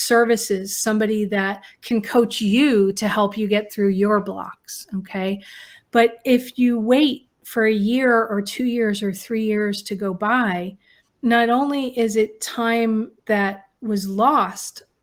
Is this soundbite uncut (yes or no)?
no